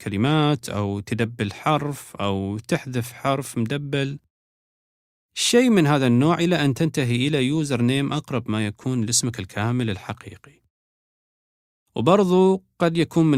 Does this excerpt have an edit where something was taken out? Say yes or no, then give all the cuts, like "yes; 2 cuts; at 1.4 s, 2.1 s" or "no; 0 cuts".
no; 0 cuts